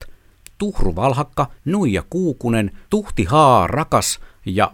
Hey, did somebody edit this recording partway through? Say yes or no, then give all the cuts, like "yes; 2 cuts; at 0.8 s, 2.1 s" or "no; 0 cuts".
yes; 2 cuts; at 1.6 s, 2.9 s